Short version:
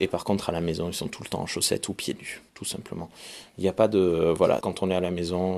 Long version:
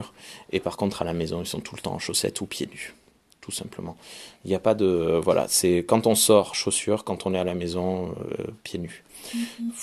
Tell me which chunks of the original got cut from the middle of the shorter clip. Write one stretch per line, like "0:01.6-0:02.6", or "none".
0:03.0-0:03.4
0:05.5-0:07.0